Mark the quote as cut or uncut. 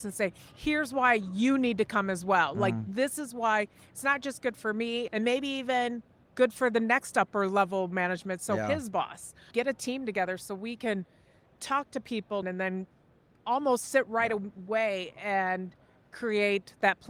cut